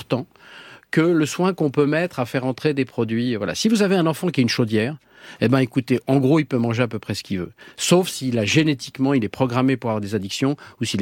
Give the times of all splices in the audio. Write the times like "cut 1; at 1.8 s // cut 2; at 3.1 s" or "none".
none